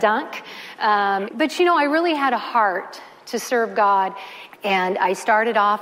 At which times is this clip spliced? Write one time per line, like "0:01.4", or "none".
0:01.3
0:04.5